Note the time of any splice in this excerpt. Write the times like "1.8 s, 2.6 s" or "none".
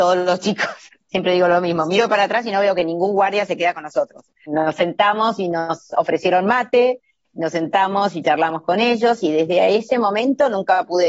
4.3 s